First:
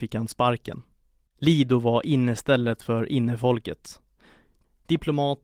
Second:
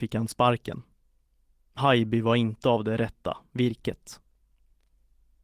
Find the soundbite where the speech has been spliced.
first; 1 cut; at 1.3 s

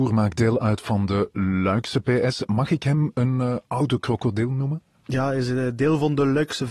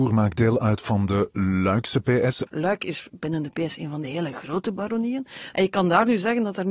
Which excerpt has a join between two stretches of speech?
second; 2 cuts; at 2.5 s, 5.5 s

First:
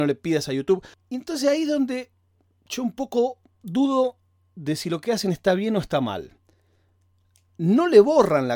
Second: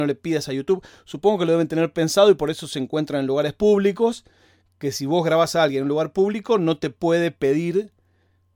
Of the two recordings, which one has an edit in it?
first; 1 cut; at 0.9 s

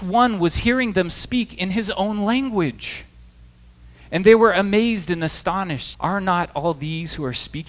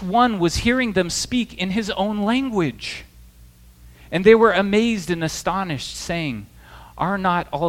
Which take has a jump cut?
first; 1 cut; at 5.9 s

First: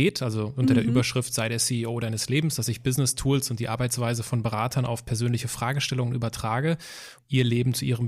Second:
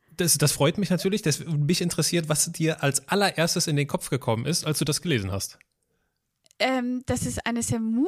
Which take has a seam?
first; 1 cut; at 7.2 s

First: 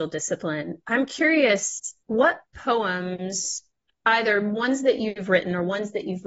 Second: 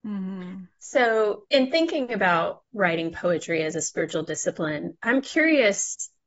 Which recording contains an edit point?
first; 1 cut; at 2.0 s

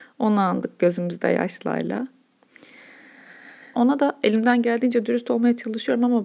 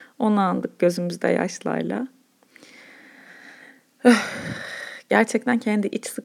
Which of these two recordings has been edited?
first; 1 cut; at 3.7 s

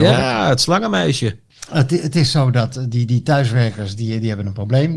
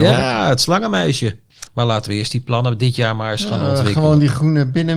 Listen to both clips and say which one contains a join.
second; 1 cut; at 1.7 s

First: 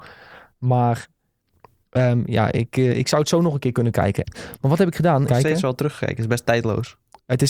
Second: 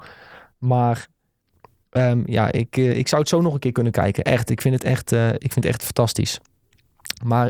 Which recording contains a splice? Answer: first; 2 cuts; at 4.2 s, 5.3 s

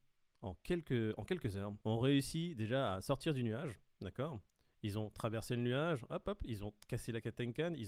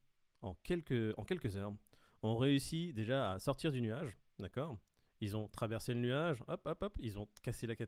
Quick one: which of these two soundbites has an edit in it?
first; 2 cuts; at 1.8 s, 6.2 s

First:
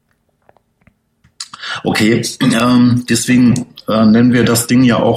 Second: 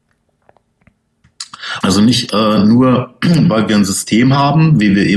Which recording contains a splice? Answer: second; 1 cut; at 1.8 s

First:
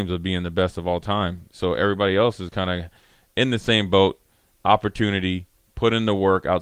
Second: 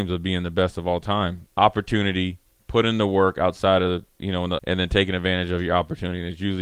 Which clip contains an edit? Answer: second; 2 cuts; at 1.5 s, 4.6 s

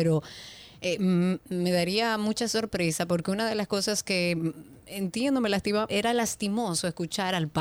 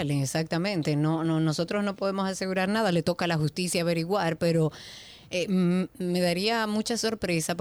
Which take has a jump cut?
first; 1 cut; at 5.9 s

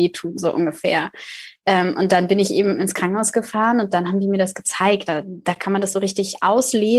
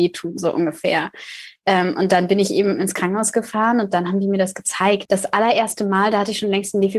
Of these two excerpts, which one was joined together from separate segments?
second; 1 cut; at 5.1 s

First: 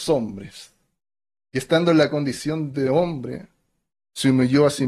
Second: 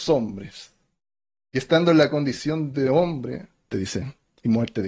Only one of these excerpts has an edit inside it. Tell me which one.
second; 1 cut; at 3.7 s

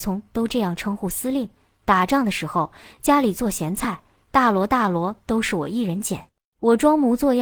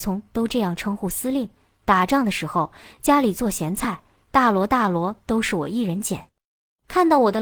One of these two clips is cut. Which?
first; 1 cut; at 6.5 s

